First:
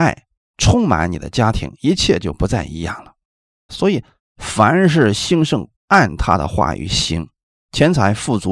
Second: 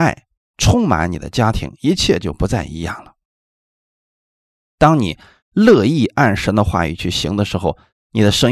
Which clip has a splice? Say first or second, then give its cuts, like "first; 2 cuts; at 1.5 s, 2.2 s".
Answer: first; 2 cuts; at 3.7 s, 5.7 s